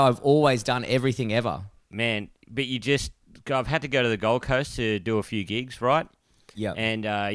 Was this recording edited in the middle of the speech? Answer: no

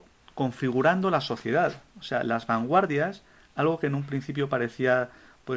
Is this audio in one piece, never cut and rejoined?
yes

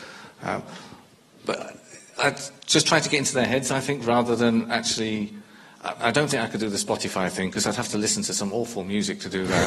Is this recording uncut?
yes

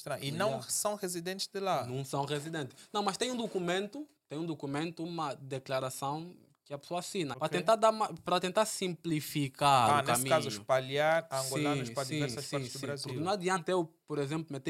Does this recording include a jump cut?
yes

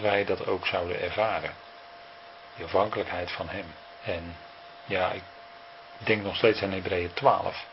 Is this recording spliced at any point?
yes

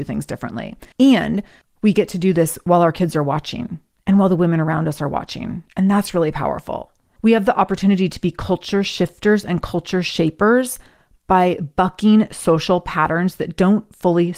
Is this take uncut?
no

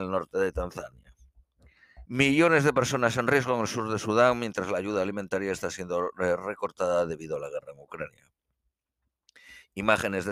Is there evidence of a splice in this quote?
yes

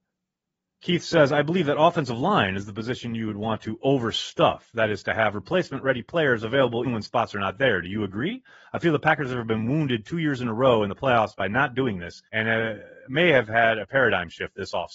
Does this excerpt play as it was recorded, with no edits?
no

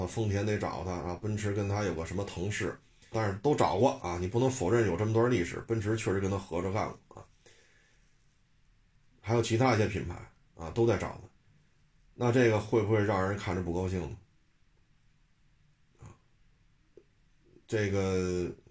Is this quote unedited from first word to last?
no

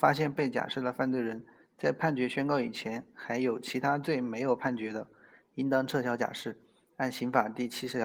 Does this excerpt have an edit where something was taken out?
no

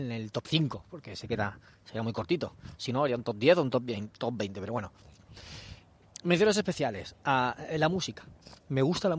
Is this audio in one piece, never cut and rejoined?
yes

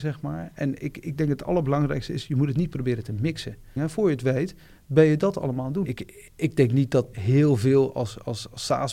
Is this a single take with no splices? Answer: no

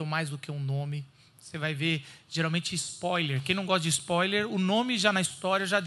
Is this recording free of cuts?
yes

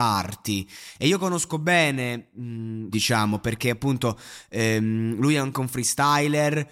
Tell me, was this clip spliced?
yes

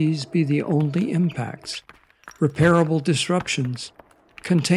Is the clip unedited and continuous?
yes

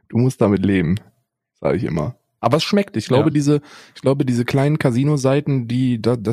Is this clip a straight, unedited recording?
yes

